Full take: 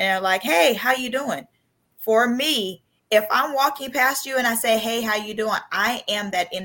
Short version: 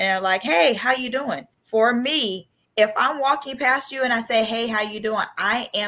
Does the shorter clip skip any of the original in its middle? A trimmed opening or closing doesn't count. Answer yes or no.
yes